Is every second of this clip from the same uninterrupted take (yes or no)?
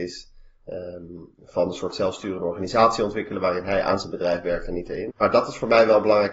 no